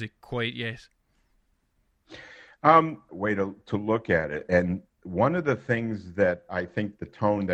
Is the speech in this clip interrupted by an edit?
yes; 1 cut; at 3.1 s

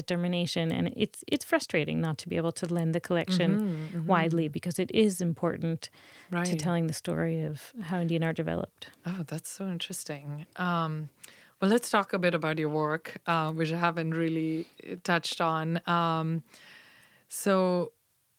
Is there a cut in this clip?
no; 0 cuts

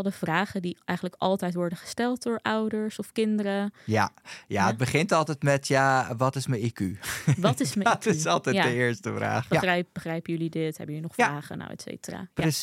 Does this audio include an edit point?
yes; 1 cut; at 9.5 s

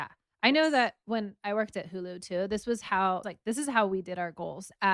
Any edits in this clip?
yes; 1 cut; at 3.2 s

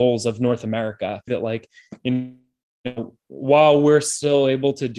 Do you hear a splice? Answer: yes; 1 cut; at 1.3 s

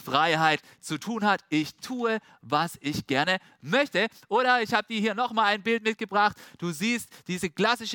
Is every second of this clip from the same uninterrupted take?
yes; 0 cuts

